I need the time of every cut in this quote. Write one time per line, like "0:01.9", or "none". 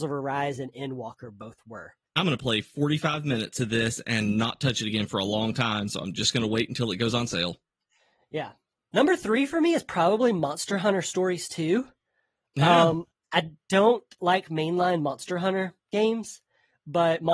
0:02.1

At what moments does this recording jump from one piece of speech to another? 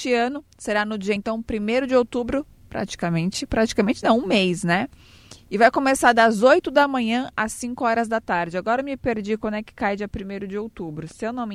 none

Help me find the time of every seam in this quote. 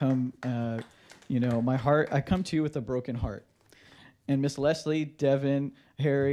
none

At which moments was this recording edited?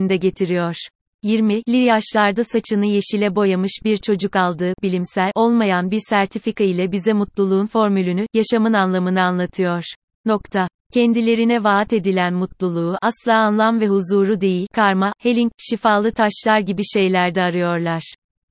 0:10.1
0:15.1

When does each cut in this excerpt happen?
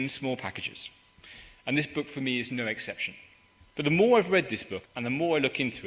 0:03.6
0:04.8

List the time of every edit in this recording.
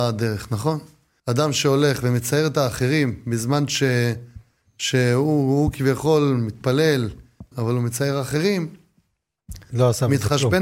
0:01.2
0:07.5

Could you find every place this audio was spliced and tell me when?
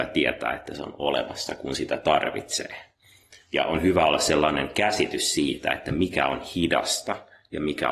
none

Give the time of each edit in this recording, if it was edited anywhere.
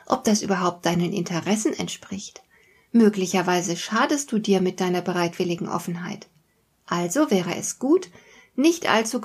none

